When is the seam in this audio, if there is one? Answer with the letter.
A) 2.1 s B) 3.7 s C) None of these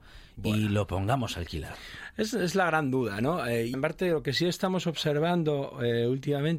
B